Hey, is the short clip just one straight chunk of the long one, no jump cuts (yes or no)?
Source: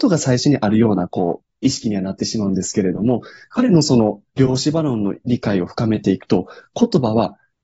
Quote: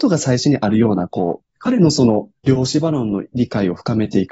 no